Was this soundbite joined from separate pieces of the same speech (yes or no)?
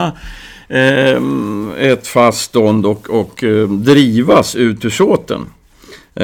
no